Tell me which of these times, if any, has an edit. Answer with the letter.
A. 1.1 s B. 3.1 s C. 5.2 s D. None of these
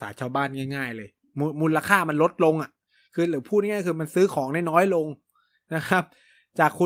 D